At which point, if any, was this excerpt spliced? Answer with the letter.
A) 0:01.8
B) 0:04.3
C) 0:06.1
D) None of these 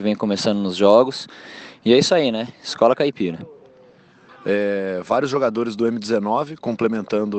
B